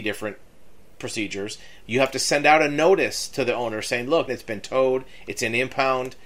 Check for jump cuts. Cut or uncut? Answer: cut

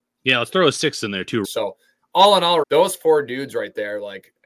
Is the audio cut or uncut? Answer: cut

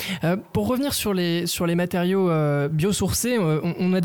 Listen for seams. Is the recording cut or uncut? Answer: uncut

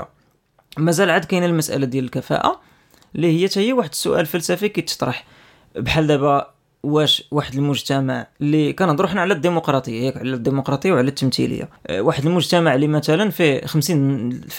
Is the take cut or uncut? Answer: cut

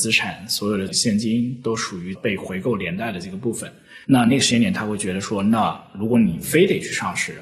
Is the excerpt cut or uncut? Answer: cut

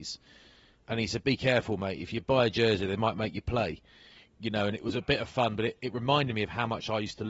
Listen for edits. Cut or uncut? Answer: uncut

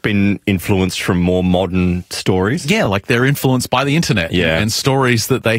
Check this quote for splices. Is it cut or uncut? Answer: uncut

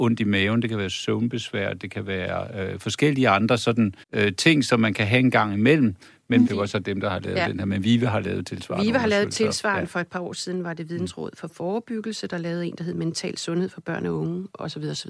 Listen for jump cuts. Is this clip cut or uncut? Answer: cut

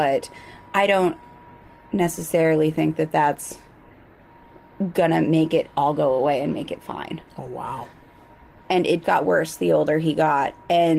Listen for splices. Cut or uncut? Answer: cut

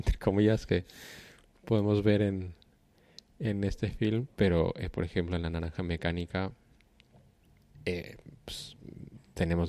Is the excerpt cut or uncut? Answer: uncut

